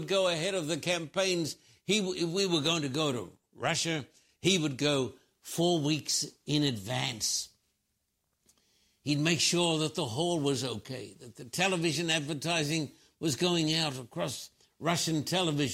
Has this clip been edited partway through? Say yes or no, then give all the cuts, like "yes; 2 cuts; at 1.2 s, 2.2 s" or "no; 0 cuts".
no; 0 cuts